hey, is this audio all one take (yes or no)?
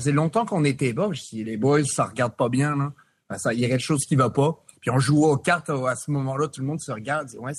yes